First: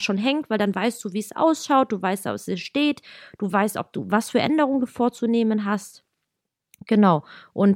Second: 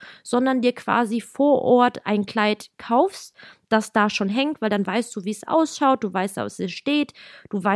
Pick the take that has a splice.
second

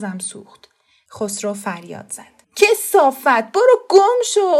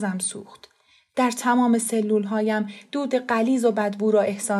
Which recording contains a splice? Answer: first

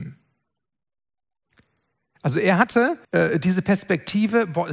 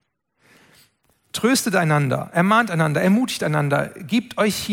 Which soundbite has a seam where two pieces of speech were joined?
first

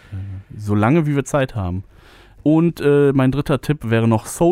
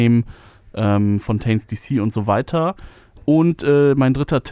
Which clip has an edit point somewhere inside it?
first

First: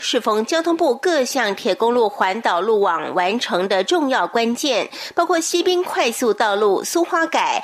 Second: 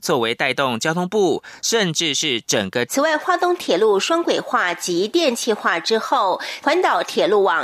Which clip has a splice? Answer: second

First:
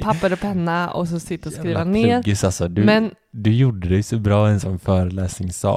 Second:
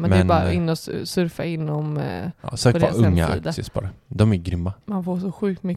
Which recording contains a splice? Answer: second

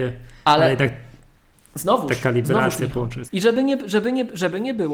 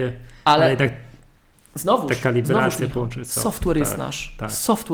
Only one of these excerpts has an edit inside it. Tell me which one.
first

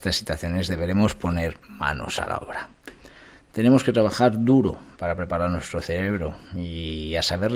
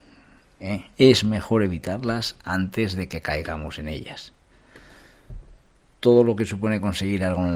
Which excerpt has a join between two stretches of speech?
second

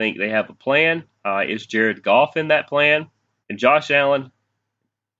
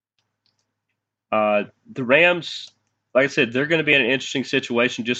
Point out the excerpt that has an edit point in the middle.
first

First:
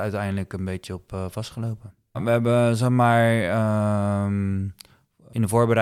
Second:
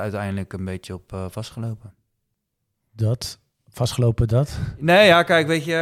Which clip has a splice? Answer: first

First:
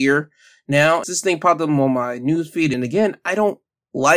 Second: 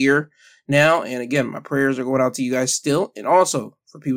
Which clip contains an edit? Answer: first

